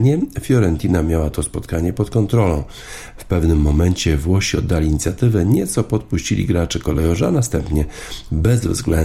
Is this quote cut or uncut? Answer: uncut